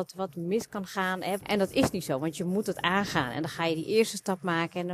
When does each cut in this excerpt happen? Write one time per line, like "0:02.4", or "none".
0:01.4